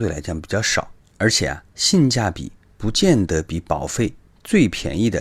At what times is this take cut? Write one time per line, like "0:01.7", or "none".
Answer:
0:01.7